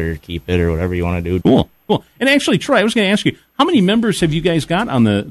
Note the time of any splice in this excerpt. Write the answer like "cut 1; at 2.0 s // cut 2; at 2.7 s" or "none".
cut 1; at 1.4 s